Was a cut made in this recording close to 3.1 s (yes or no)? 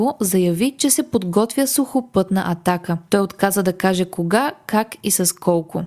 no